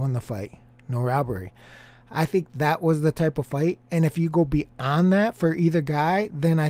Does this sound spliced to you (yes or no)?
no